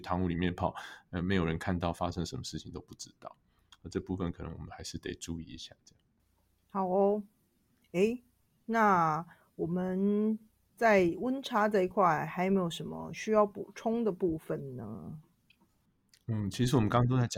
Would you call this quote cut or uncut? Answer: uncut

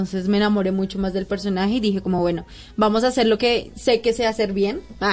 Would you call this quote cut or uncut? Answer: uncut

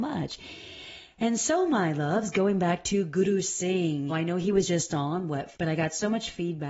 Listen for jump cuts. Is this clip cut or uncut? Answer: cut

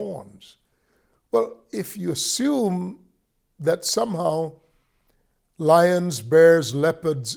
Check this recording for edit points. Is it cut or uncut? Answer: uncut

